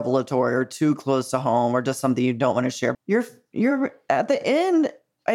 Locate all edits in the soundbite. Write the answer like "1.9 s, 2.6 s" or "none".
2.9 s